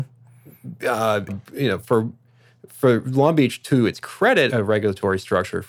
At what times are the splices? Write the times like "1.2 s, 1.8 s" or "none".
1.3 s, 4.5 s